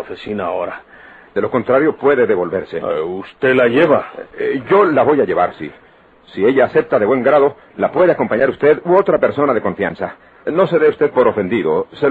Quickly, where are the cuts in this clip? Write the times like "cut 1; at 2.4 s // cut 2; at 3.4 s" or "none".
cut 1; at 1.3 s // cut 2; at 6.1 s // cut 3; at 10.5 s